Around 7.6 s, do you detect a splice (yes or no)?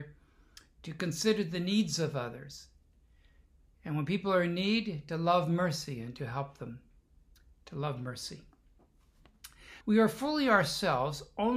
no